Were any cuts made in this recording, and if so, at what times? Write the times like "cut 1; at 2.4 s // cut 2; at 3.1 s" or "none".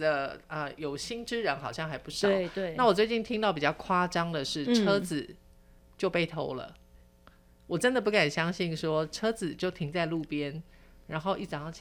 none